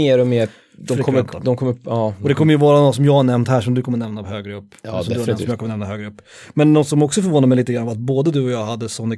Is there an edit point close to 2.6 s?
no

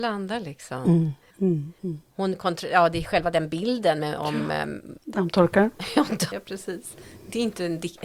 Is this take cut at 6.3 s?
yes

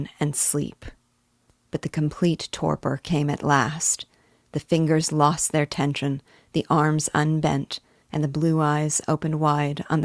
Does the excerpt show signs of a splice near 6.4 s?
no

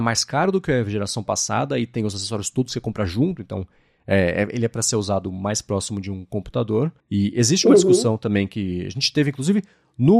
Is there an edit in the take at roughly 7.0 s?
yes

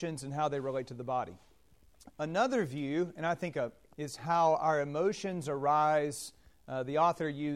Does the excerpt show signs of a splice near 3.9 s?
yes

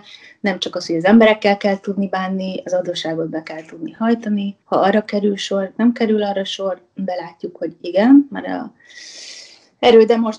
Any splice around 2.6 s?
no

